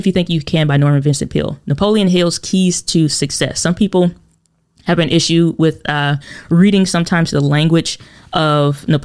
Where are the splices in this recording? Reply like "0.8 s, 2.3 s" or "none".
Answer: none